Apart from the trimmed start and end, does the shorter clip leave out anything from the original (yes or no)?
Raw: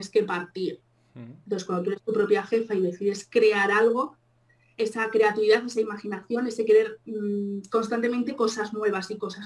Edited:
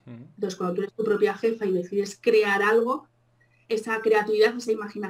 no